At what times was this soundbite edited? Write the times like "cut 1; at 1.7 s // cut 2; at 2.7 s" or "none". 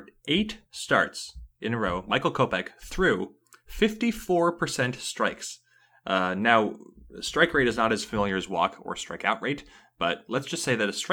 none